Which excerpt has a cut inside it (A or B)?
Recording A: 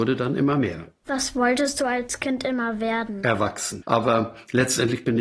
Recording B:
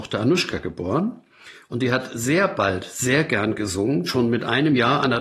A